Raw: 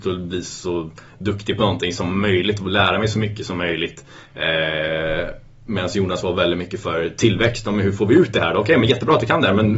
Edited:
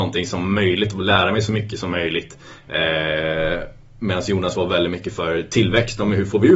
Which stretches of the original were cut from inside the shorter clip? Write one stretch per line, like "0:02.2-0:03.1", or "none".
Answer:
none